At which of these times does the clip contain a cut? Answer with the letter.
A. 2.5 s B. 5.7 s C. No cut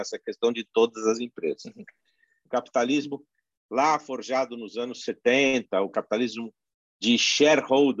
A